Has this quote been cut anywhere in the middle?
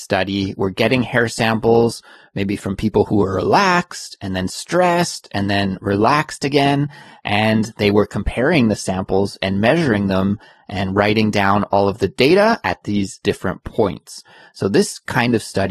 no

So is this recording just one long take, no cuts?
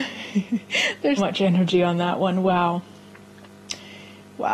no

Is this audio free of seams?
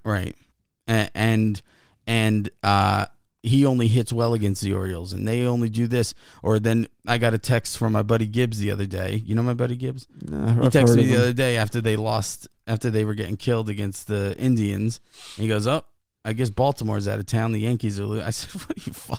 yes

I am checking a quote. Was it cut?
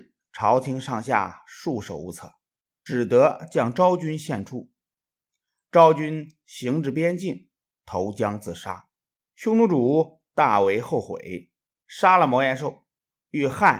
no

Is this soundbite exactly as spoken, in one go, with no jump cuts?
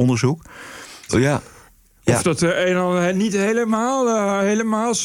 no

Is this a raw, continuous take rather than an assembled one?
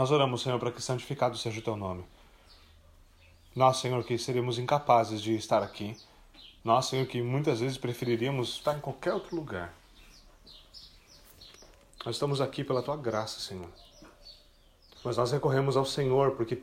no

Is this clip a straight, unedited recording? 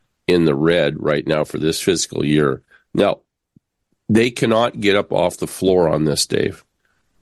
yes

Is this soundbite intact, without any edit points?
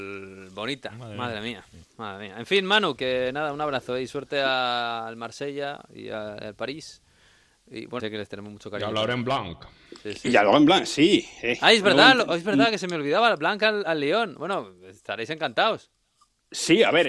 no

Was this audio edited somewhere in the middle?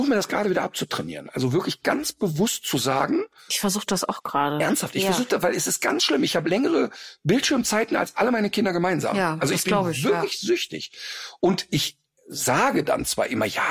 no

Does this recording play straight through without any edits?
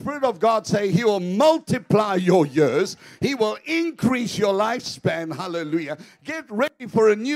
yes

